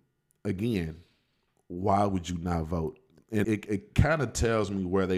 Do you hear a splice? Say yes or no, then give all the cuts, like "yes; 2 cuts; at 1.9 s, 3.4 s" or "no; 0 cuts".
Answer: yes; 1 cut; at 3.4 s